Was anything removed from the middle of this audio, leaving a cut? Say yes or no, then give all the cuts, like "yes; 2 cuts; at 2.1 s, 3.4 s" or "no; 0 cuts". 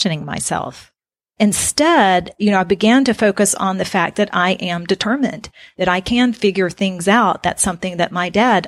no; 0 cuts